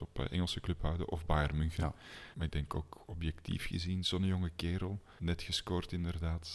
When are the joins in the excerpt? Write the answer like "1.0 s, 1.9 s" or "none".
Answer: 2.3 s, 5.2 s